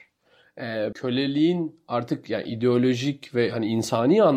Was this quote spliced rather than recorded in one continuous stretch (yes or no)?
yes